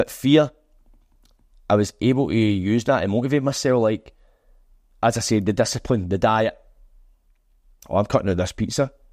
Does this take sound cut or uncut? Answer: uncut